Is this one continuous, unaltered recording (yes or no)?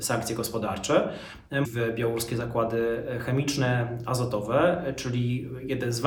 no